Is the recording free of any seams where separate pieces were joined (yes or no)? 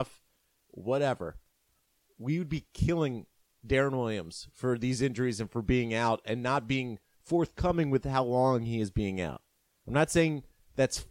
yes